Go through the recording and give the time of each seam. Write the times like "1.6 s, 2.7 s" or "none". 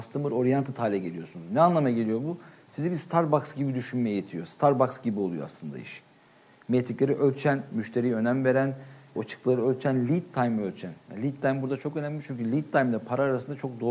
9.2 s